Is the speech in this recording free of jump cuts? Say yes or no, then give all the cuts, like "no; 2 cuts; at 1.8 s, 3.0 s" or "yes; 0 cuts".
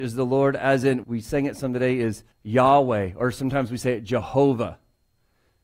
no; 2 cuts; at 1.0 s, 2.3 s